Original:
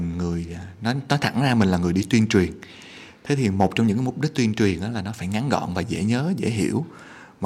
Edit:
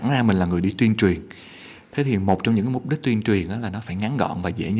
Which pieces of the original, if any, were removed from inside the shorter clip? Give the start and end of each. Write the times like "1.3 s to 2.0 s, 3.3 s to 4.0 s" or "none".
none